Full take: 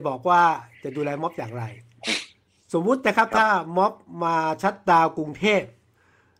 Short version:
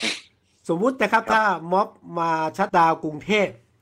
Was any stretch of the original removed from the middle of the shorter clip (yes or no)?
yes